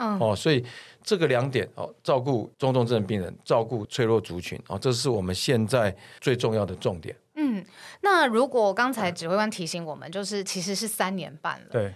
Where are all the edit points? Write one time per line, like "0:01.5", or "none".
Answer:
none